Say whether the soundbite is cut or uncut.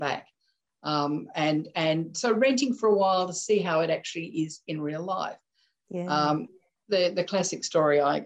uncut